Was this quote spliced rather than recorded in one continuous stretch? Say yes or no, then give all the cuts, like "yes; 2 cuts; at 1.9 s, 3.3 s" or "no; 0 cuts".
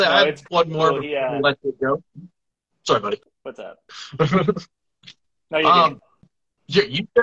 no; 0 cuts